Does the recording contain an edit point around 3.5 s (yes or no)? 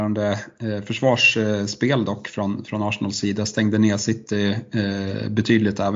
no